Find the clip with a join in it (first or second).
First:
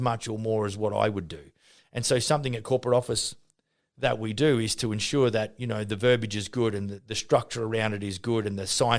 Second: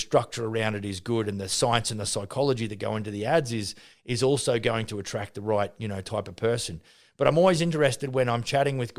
first